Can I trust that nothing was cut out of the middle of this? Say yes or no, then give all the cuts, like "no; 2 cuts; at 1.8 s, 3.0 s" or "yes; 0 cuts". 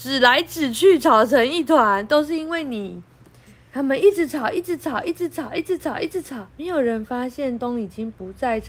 no; 2 cuts; at 6.5 s, 7.6 s